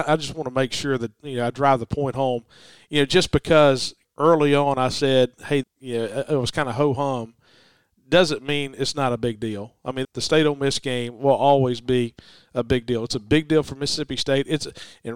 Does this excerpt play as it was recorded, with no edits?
no; 2 cuts; at 5.6 s, 10.0 s

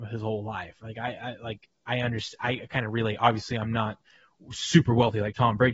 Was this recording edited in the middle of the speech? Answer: no; 0 cuts

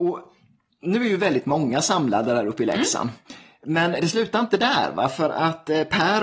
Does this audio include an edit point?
no; 0 cuts

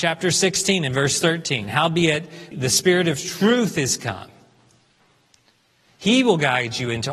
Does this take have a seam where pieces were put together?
yes; 1 cut; at 2.5 s

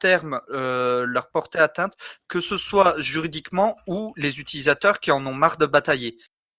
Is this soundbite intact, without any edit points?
yes; 0 cuts

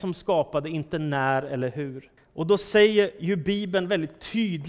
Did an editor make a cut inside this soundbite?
yes; 1 cut; at 2.2 s

